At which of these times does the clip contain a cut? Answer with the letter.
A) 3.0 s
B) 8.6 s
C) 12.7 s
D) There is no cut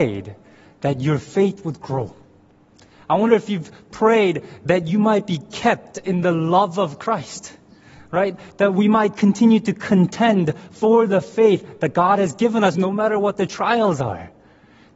C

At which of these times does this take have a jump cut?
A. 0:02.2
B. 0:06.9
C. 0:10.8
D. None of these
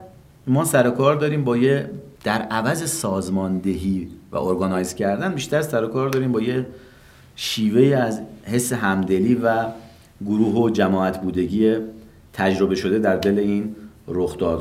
A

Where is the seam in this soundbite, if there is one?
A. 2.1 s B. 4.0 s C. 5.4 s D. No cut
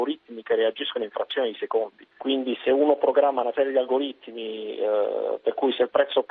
A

